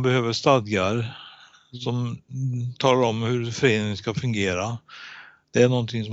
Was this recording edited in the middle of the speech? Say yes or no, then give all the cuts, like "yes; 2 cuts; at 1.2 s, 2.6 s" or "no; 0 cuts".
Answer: no; 0 cuts